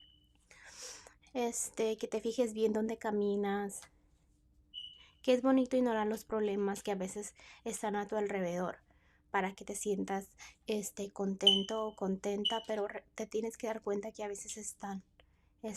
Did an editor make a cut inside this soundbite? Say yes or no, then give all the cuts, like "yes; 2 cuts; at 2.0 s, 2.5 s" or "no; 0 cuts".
no; 0 cuts